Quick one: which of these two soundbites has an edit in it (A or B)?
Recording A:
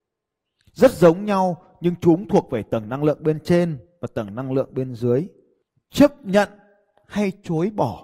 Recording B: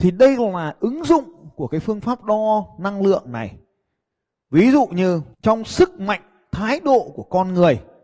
B